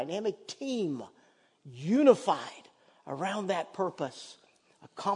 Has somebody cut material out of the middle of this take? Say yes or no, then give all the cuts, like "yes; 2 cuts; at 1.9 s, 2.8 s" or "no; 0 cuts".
no; 0 cuts